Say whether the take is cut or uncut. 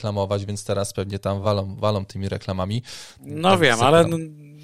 uncut